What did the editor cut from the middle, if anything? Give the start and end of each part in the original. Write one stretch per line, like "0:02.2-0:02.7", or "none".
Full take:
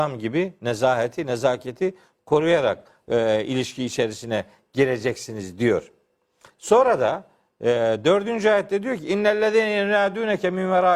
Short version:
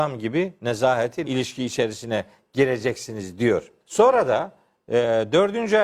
0:01.3-0:03.5
0:06.0-0:06.5